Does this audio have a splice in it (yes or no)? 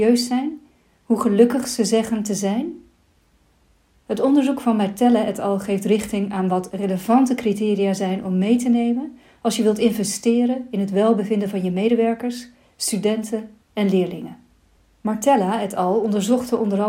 no